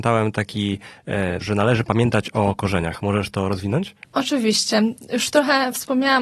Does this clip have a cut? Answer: yes; 1 cut; at 1.4 s

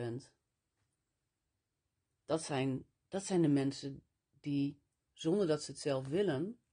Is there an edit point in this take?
no; 0 cuts

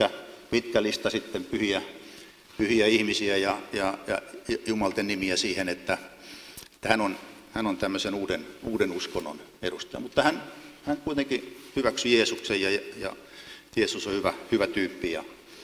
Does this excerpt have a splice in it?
no; 0 cuts

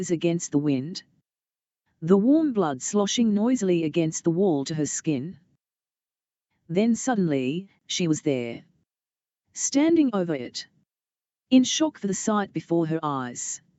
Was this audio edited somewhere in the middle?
no; 0 cuts

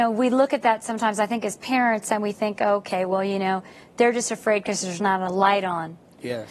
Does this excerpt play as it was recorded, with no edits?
yes; 0 cuts

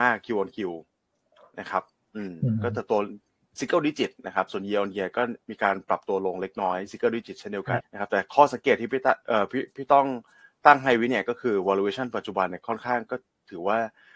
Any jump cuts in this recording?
yes; 1 cut; at 7.8 s

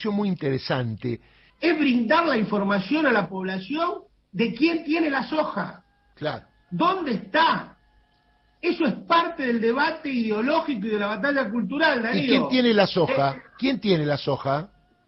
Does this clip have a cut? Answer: yes; 1 cut; at 1.5 s

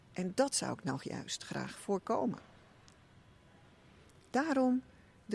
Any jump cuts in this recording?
no; 0 cuts

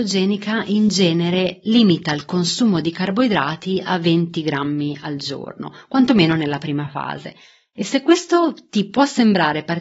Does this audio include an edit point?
no; 0 cuts

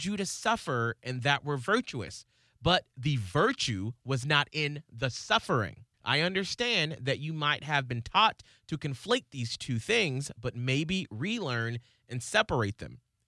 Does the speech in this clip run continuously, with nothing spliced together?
no; 1 cut; at 5.9 s

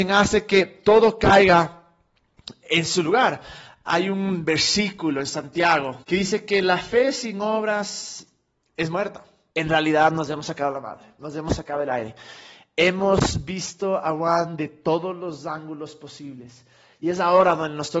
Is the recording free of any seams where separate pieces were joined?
no; 2 cuts; at 6.0 s, 9.5 s

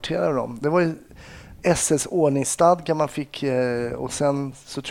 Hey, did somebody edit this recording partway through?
no; 0 cuts

